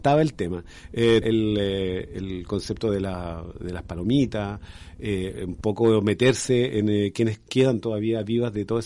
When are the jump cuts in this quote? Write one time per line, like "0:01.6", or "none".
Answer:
0:01.2